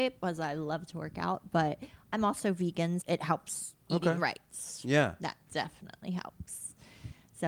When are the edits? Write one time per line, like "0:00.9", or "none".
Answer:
0:03.0